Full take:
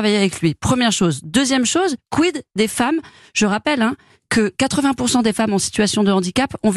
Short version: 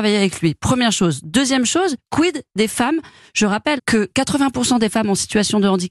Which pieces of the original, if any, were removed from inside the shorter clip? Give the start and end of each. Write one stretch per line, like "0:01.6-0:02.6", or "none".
0:03.8-0:04.2

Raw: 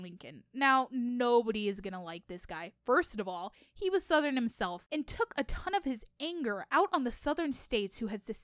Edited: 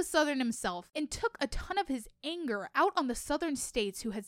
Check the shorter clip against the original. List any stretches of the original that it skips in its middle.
none

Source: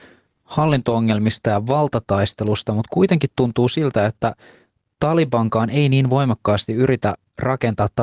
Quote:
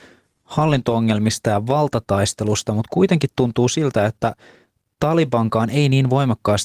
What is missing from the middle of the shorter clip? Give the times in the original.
none

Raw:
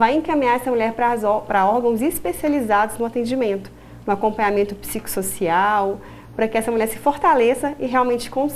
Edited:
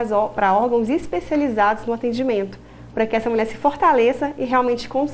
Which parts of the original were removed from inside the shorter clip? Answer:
0:04.0-0:06.3

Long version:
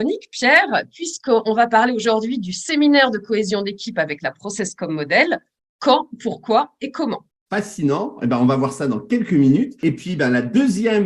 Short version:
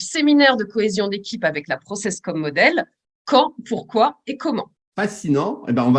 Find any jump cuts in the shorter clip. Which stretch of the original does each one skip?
none

